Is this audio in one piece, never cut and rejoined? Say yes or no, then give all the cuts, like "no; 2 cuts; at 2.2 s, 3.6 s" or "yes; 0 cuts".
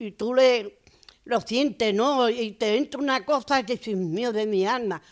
yes; 0 cuts